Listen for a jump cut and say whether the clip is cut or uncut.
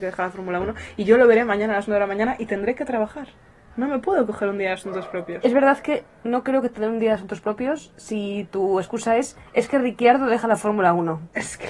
uncut